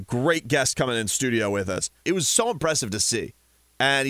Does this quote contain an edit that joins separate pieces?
yes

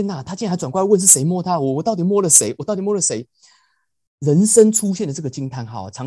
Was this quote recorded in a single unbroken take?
yes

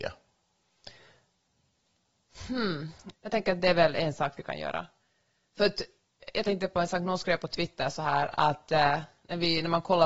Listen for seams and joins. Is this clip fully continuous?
no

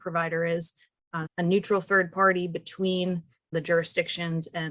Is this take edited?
yes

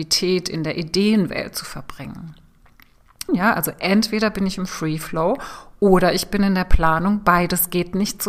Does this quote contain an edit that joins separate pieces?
yes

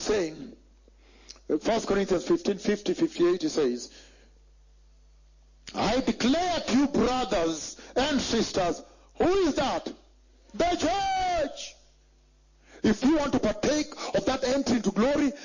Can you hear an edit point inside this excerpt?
yes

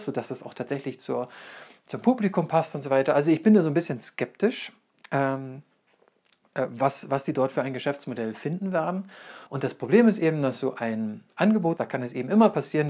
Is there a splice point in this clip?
yes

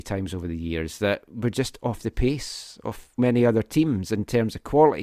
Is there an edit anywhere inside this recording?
yes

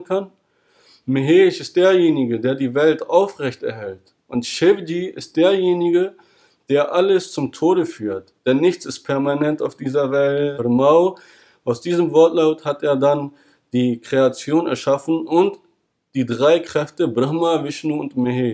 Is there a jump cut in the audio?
yes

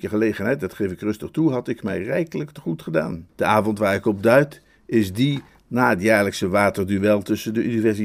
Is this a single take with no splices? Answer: no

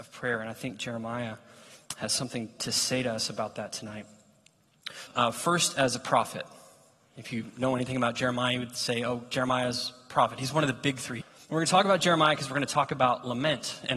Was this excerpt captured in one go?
no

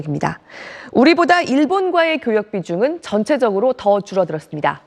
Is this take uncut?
yes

